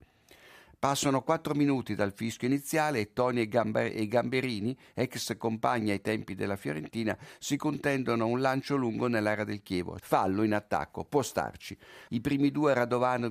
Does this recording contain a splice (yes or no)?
yes